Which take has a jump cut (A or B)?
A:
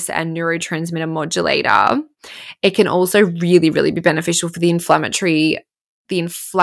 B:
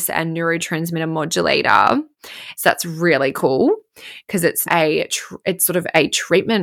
B